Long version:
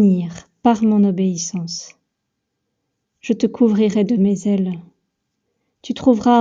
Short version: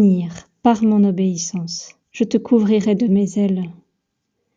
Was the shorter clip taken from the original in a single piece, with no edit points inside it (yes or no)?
no